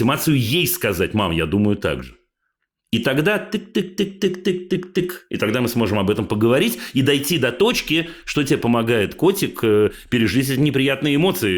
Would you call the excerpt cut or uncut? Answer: uncut